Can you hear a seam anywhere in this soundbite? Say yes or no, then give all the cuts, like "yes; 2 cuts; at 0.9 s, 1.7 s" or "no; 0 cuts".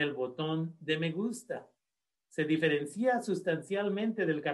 yes; 1 cut; at 2.1 s